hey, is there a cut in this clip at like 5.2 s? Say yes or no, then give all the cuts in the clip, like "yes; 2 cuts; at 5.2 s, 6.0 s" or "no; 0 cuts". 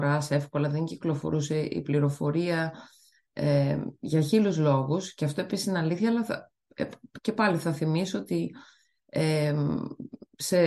no; 0 cuts